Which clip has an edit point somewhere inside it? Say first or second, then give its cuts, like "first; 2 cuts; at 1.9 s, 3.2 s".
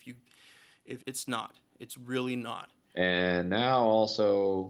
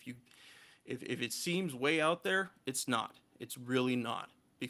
first; 2 cuts; at 1.0 s, 2.8 s